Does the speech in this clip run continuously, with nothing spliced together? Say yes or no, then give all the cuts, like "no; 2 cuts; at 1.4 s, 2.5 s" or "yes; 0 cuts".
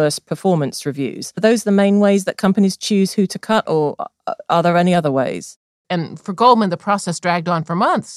no; 1 cut; at 5.8 s